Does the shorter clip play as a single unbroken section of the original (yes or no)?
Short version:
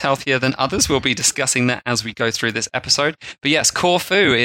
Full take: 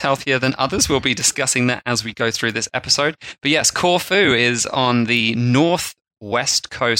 yes